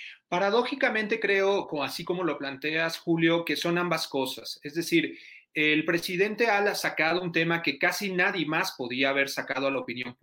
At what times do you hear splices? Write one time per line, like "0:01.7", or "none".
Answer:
none